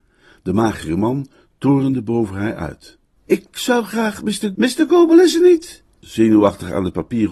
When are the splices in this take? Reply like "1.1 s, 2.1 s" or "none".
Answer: 3.2 s, 4.6 s, 6.0 s